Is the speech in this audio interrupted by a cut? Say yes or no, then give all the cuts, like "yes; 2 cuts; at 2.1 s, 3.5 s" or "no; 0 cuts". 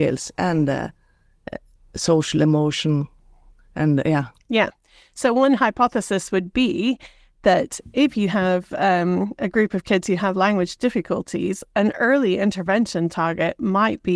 no; 0 cuts